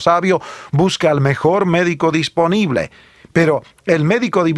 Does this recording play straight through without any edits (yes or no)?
yes